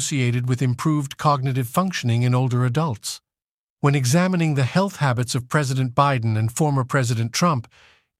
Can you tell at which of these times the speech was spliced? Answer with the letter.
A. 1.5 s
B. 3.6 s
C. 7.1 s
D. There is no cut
D